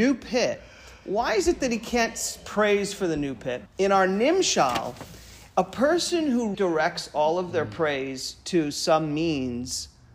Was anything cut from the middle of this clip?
yes; 2 cuts; at 3.7 s, 6.5 s

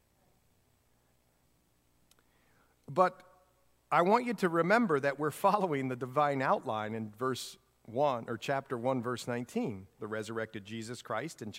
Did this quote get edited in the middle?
yes; 1 cut; at 10.0 s

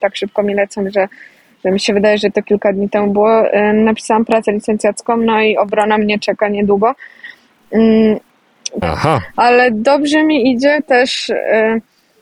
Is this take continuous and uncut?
no; 1 cut; at 8.8 s

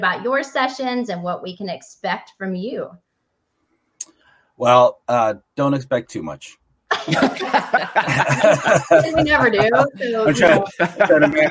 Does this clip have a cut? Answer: no; 0 cuts

